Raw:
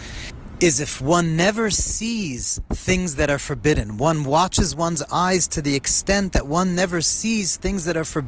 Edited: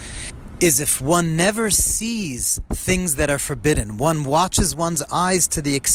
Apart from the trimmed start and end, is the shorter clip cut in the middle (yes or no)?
no